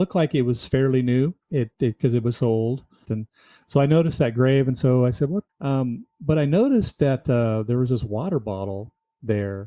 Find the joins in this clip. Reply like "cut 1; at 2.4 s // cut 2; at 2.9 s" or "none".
cut 1; at 1.4 s // cut 2; at 3.0 s // cut 3; at 5.5 s